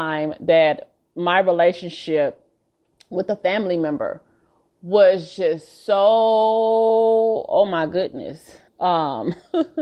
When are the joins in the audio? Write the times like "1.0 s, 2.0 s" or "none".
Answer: 8.7 s